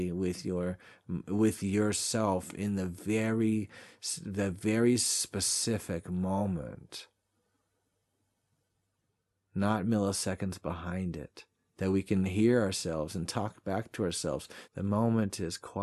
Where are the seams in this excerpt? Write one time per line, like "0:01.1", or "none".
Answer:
0:11.7
0:14.6